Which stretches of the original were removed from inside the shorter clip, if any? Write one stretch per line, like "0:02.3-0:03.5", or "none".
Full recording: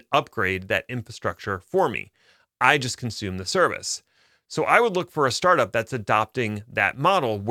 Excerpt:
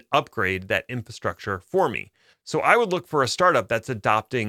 0:02.3-0:04.4

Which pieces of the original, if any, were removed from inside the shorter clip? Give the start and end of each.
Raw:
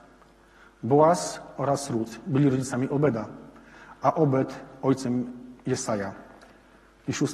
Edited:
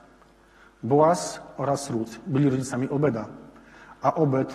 none

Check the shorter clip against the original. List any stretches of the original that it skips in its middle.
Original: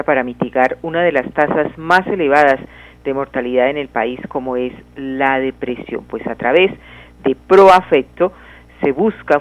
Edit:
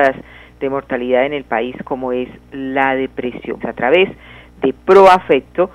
0:06.0-0:06.2

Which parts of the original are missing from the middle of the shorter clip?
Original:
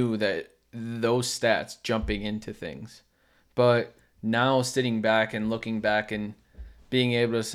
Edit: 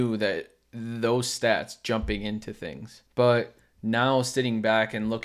0:03.1-0:03.5

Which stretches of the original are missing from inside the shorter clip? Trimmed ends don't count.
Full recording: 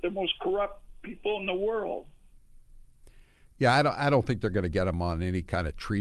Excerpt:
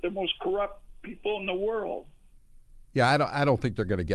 0:02.9-0:03.5

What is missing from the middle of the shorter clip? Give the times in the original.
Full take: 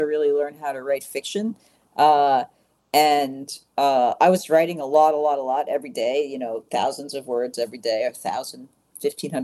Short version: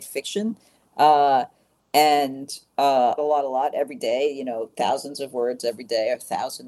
0:04.2-0:05.1

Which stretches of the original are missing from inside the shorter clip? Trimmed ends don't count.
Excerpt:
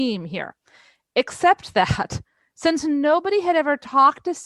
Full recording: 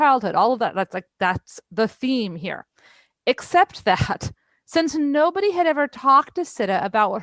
none

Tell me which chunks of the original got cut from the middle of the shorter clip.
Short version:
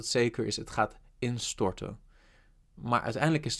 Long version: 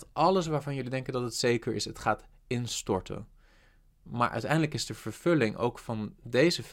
none

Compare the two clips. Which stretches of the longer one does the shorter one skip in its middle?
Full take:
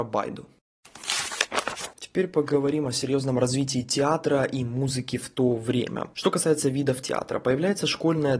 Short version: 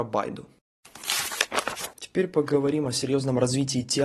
none

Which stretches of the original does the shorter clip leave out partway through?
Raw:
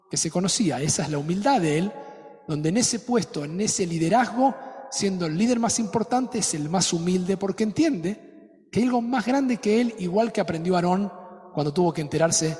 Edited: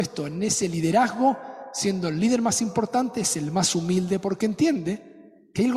none

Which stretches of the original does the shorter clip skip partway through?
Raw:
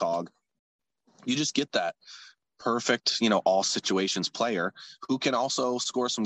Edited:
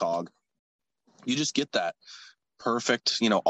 none

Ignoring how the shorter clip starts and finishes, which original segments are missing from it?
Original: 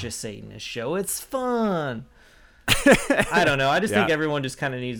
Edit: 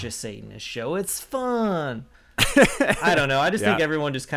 0:02.1-0:02.4

